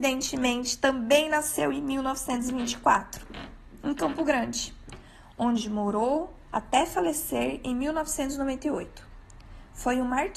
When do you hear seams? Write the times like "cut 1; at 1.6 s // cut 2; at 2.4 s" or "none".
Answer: none